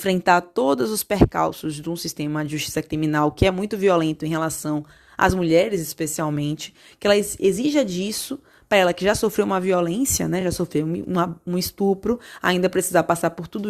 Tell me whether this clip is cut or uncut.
uncut